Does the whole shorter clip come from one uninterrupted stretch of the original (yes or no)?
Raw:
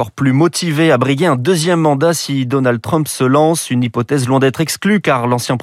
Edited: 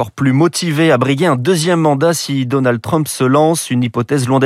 yes